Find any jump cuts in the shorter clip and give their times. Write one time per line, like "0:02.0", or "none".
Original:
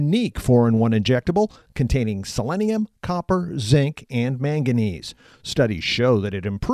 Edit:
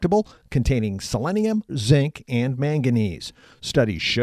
0:01.7

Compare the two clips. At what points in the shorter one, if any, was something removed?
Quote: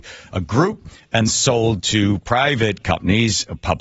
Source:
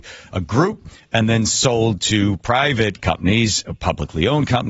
0:01.3

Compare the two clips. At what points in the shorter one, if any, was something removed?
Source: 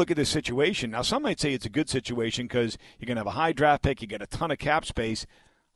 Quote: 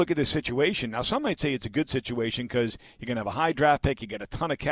none

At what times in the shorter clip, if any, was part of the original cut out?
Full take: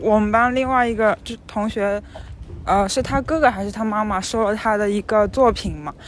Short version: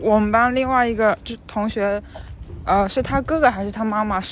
none

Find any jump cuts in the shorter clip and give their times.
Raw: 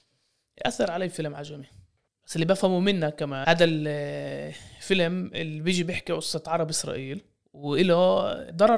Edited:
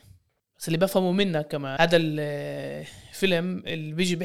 none

